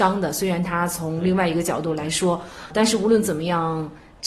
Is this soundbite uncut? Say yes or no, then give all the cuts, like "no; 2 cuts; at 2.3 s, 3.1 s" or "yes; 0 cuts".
no; 1 cut; at 2.7 s